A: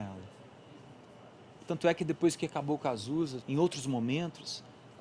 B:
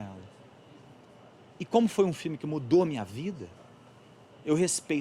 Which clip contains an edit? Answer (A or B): A